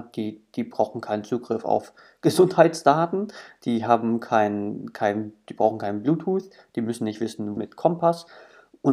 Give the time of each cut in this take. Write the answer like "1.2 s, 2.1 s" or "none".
7.6 s